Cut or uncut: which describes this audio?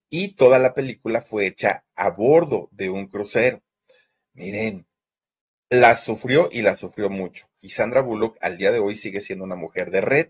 cut